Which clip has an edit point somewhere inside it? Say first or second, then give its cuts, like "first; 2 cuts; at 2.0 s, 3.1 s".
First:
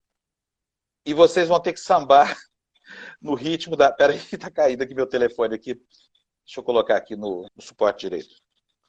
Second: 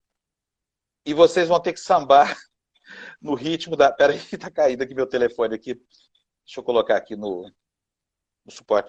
first; 1 cut; at 7.5 s